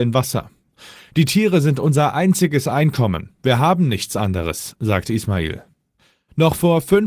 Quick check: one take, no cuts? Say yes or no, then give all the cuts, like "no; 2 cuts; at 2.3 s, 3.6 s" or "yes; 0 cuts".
no; 1 cut; at 1.0 s